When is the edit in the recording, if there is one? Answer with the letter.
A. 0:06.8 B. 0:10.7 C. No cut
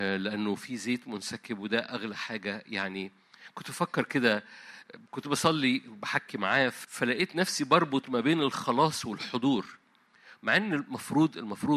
A